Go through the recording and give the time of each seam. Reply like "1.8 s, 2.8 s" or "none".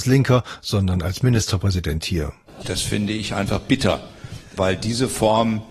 2.5 s